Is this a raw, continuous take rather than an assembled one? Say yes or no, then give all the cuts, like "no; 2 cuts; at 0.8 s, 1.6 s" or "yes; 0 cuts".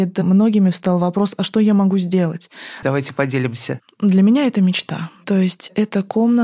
no; 1 cut; at 2.8 s